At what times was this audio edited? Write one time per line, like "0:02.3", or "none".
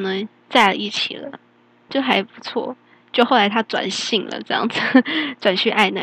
0:01.9

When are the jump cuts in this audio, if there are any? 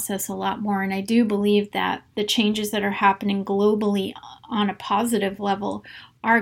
none

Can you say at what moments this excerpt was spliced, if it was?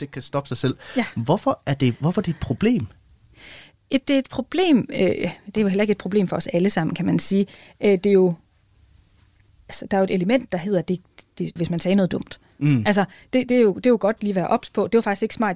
0:04.0
0:11.6

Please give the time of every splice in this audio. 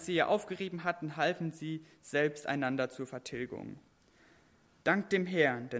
0:04.8

